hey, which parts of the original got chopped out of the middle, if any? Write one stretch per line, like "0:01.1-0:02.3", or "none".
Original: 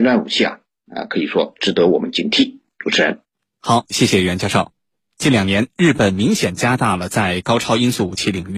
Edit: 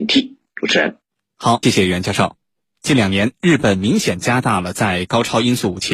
0:03.9-0:04.0